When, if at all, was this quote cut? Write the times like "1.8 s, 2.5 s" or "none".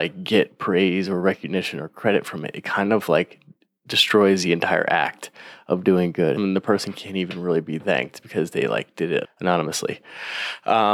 6.4 s, 9.2 s